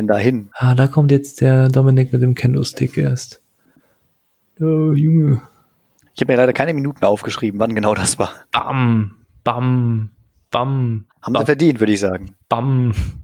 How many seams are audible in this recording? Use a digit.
1